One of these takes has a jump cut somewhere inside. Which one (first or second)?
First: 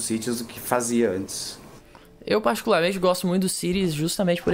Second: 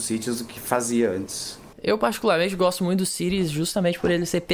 second